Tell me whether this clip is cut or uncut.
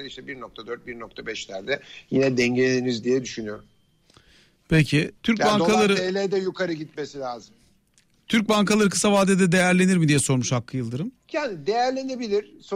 cut